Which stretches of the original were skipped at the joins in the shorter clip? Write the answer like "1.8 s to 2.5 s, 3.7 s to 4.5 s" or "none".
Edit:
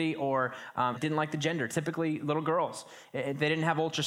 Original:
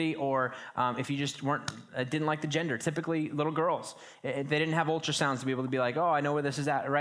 1.0 s to 2.1 s